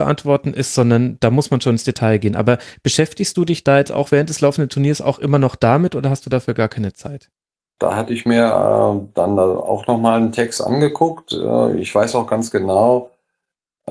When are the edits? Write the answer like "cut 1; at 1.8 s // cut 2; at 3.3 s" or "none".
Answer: cut 1; at 7.8 s